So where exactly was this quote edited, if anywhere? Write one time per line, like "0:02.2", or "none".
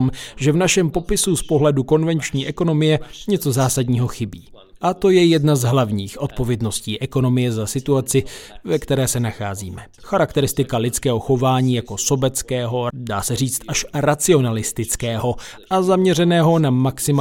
0:10.0
0:12.9